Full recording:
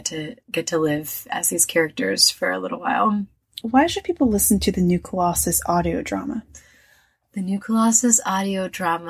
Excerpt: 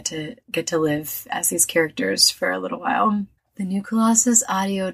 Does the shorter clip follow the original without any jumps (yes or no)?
no